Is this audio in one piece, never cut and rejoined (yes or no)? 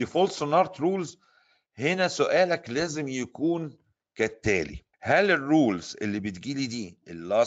no